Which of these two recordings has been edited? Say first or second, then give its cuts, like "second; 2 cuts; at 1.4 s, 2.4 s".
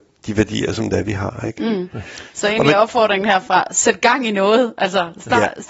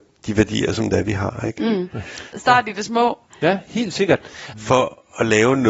second; 2 cuts; at 2.3 s, 4.5 s